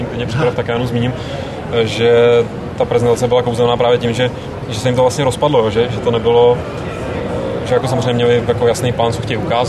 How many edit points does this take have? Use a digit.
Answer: 0